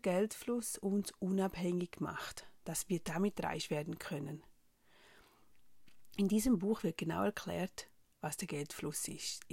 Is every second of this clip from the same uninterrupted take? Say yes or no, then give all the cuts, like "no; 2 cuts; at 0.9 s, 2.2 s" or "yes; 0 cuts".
yes; 0 cuts